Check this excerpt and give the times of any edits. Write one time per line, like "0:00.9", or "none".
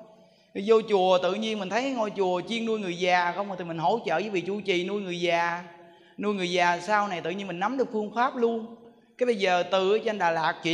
none